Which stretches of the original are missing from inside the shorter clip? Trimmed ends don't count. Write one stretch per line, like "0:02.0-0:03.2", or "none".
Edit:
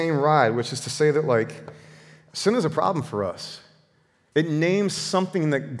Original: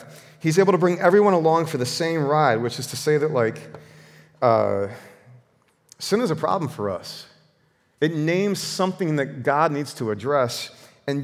0:04.4-0:05.9